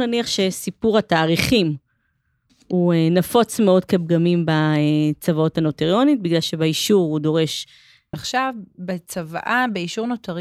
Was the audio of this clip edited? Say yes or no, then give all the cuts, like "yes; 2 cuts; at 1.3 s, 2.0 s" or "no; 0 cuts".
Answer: yes; 1 cut; at 8.1 s